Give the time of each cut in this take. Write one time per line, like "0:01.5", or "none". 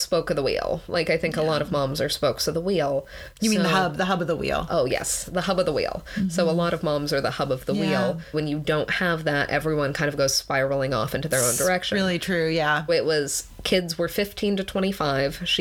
0:08.3
0:12.9